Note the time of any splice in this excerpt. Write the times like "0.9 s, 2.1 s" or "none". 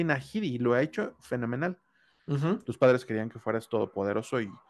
2.6 s